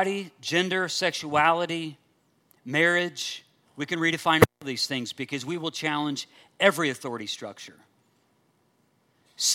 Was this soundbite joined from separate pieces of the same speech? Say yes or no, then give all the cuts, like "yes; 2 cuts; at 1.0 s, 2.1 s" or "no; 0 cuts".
no; 0 cuts